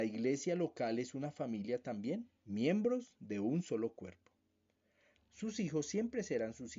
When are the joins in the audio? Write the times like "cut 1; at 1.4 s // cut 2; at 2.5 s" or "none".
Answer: cut 1; at 2.4 s // cut 2; at 5.2 s